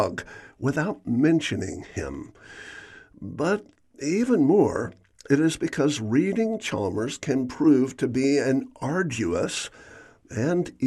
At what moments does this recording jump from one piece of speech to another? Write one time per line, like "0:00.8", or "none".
none